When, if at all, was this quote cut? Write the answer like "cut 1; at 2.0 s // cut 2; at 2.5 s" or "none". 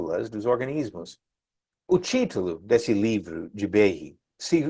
cut 1; at 1.7 s